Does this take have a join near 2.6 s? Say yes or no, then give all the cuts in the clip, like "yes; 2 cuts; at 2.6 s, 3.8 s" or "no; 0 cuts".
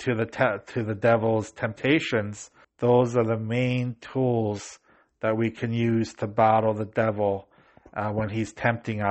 yes; 1 cut; at 2.6 s